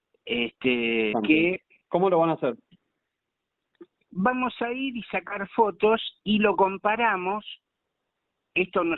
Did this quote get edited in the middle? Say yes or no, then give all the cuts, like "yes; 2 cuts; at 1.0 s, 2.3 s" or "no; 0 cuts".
yes; 1 cut; at 1.1 s